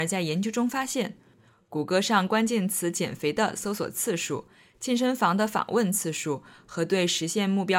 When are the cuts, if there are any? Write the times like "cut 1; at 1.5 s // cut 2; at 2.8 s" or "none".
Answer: none